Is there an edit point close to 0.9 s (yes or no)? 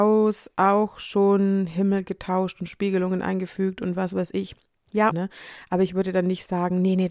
no